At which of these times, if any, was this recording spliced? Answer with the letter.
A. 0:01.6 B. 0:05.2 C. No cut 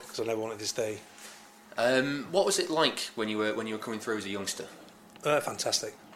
A